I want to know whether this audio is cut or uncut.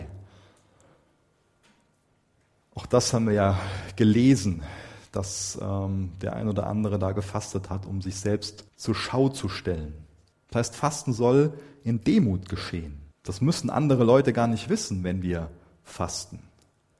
cut